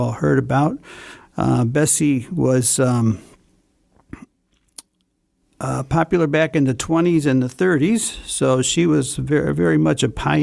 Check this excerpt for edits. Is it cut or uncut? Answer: uncut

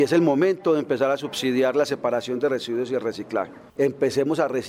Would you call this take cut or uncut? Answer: cut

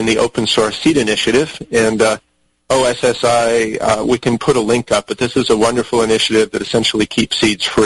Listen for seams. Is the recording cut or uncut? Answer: uncut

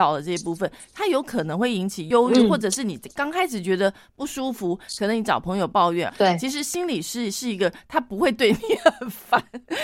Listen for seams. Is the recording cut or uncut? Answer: cut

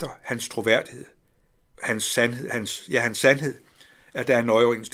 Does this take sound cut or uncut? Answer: cut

